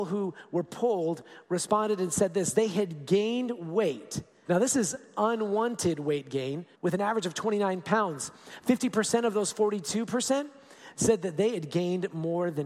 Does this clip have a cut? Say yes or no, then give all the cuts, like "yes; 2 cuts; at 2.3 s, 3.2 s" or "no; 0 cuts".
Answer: yes; 2 cuts; at 4.4 s, 6.7 s